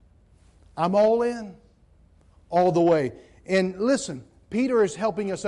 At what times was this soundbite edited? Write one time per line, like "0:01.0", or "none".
0:02.3